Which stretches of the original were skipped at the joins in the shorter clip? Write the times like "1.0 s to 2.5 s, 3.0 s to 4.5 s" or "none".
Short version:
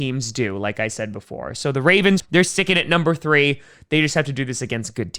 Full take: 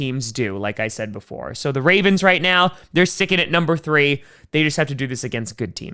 2.2 s to 2.8 s